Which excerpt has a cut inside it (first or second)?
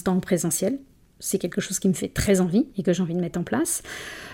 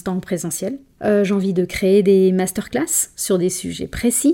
second